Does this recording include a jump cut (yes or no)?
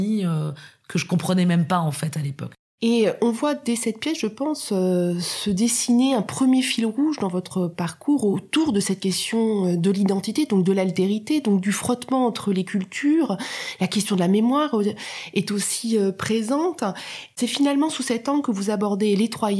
no